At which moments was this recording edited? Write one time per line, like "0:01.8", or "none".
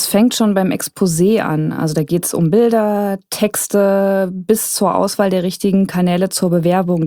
none